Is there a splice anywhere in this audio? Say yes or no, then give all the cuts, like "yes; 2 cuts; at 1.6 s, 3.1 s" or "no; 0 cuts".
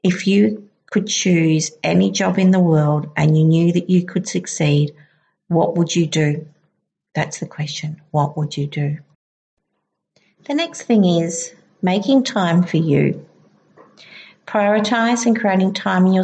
no; 0 cuts